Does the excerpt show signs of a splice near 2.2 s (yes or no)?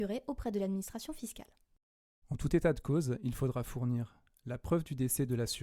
yes